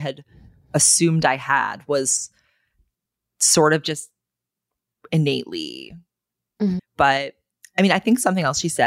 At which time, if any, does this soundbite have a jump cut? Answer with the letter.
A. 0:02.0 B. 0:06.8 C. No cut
B